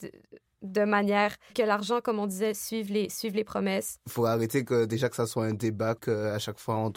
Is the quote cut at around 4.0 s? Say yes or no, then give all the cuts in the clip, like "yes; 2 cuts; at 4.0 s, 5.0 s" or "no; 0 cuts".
no; 1 cut; at 1.5 s